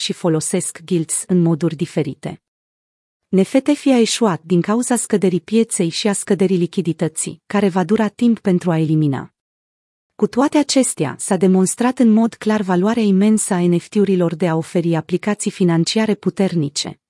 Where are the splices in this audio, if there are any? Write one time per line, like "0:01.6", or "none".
0:04.4

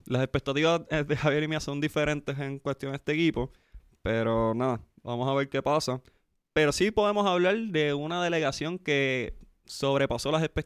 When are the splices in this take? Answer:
none

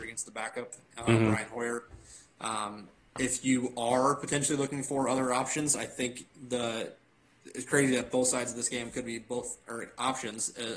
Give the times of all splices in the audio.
none

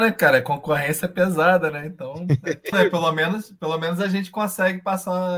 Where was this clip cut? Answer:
0:02.7

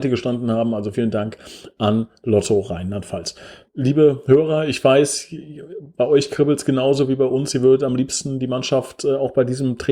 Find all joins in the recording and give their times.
0:00.9
0:03.7

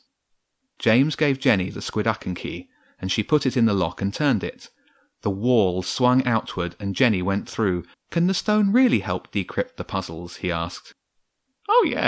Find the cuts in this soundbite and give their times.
0:07.9

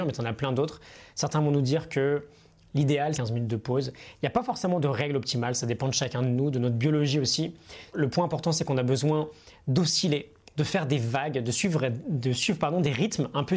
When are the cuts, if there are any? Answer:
0:03.1
0:07.9

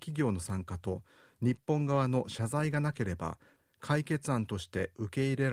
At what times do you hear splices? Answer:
none

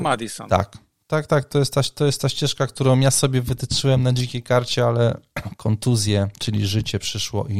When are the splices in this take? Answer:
0:01.3

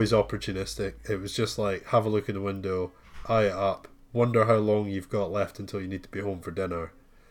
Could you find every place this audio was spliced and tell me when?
none

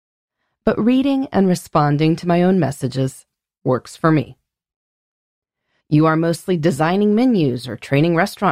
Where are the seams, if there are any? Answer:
0:05.8

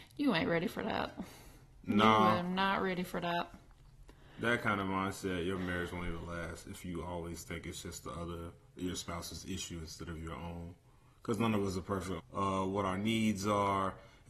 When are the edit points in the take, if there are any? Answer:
0:12.2

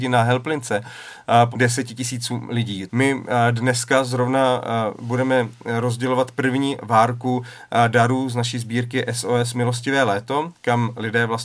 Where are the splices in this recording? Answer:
0:01.5
0:02.9

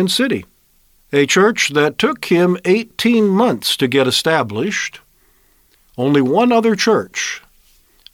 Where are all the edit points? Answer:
0:01.0

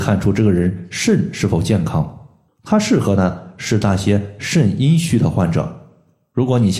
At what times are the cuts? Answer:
0:02.5

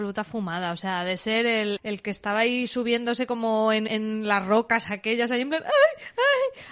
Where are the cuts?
0:01.8
0:03.9

